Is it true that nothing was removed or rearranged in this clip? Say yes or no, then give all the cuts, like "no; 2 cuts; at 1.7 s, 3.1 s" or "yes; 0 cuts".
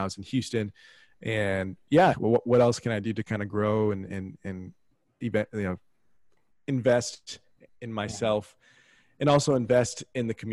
no; 1 cut; at 2.1 s